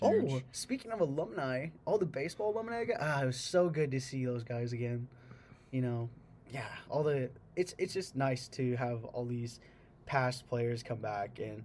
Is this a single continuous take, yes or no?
yes